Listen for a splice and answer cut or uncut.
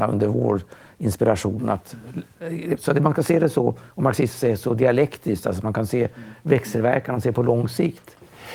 uncut